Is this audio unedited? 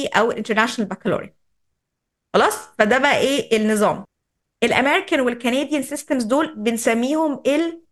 yes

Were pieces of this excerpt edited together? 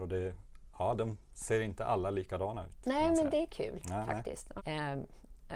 yes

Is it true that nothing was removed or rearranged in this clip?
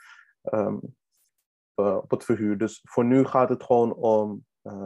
no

